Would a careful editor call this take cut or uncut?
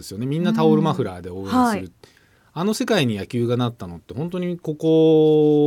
uncut